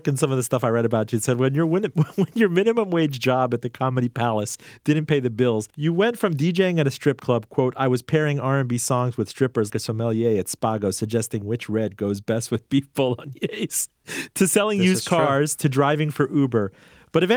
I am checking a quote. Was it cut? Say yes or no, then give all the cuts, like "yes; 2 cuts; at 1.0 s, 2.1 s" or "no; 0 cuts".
yes; 2 cuts; at 5.7 s, 9.7 s